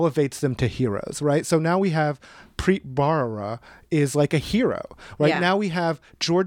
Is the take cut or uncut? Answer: uncut